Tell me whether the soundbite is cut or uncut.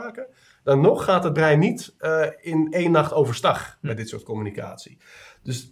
uncut